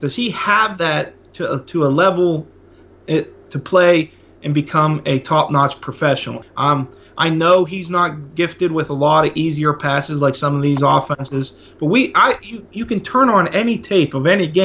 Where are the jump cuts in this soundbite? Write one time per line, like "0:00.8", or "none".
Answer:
0:06.4